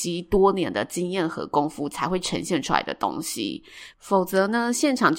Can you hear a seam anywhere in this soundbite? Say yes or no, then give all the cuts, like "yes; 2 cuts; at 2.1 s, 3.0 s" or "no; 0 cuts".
no; 0 cuts